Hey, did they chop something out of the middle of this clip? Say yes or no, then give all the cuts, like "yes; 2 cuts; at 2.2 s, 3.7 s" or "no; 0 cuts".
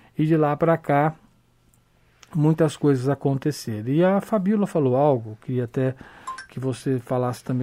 no; 0 cuts